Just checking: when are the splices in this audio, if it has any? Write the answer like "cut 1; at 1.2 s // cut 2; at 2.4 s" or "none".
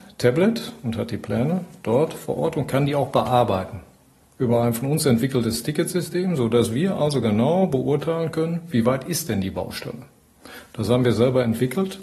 none